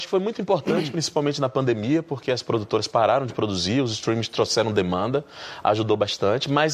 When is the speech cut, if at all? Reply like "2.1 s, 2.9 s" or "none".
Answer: none